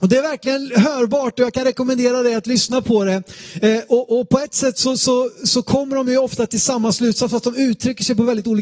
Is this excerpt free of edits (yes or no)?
yes